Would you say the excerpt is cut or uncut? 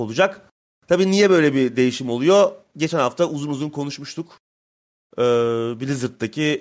uncut